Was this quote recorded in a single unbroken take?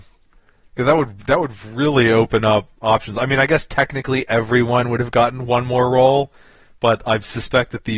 no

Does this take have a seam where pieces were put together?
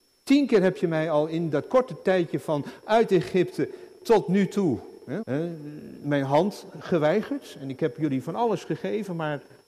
yes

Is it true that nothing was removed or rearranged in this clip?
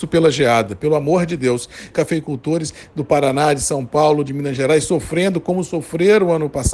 no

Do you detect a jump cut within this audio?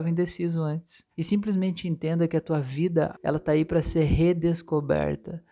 yes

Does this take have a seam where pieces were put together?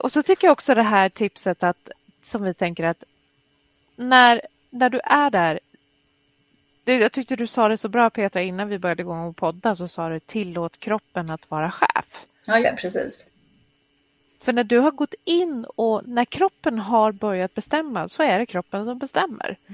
yes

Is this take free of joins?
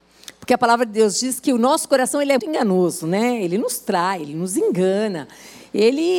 no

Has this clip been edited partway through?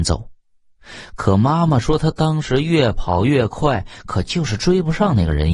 no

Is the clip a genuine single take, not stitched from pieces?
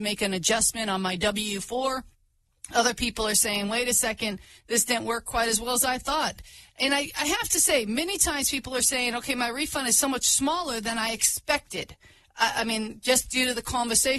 yes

